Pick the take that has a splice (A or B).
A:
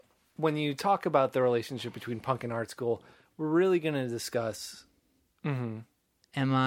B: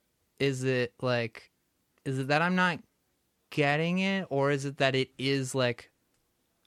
A